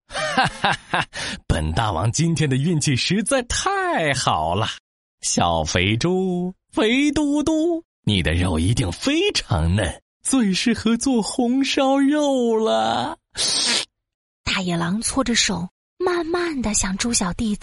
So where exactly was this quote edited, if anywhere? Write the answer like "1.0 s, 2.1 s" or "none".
none